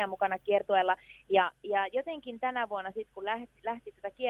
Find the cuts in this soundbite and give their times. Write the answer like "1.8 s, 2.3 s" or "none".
1.2 s